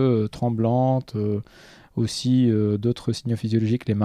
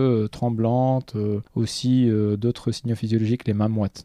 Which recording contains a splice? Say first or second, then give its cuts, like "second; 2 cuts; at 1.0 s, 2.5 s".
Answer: second; 1 cut; at 1.5 s